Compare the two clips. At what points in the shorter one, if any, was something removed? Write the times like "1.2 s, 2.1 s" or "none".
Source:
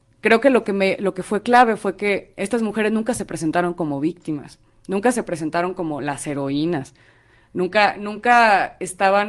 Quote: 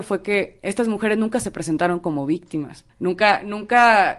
2.9 s